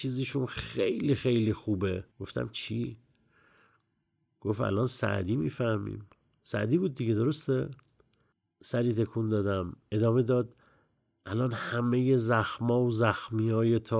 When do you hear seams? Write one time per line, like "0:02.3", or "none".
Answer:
0:02.1